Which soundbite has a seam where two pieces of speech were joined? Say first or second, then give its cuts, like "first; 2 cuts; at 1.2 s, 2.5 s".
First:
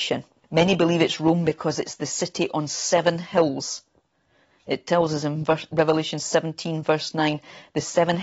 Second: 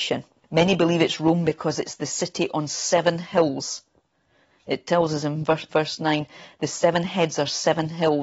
second; 1 cut; at 5.7 s